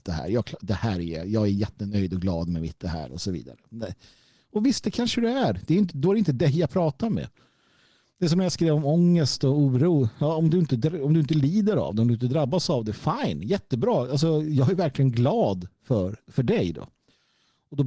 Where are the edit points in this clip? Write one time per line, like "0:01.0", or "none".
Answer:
none